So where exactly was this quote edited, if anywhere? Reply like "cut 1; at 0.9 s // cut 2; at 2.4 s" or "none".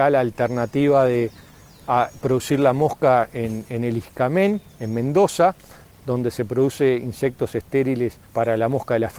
cut 1; at 8.2 s